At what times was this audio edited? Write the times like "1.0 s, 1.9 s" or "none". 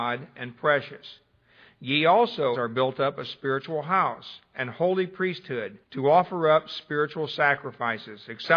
2.5 s, 5.8 s